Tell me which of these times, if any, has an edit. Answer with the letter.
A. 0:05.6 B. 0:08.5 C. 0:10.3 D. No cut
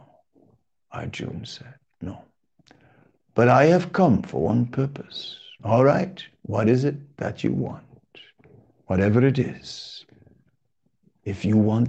A